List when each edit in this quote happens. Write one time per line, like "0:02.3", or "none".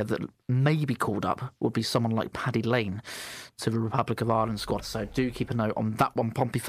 0:04.8